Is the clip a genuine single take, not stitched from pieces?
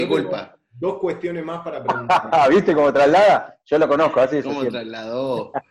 yes; 0 cuts

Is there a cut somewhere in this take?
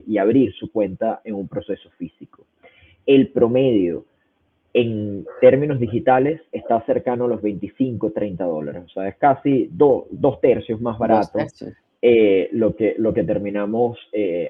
no; 0 cuts

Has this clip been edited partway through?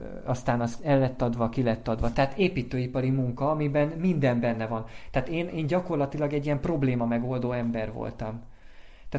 no; 0 cuts

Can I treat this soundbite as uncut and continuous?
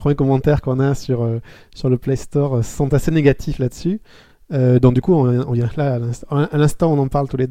yes; 0 cuts

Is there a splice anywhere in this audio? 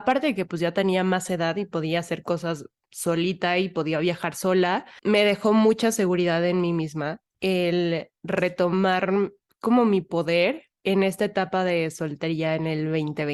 no; 0 cuts

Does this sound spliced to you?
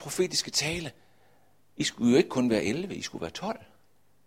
no; 0 cuts

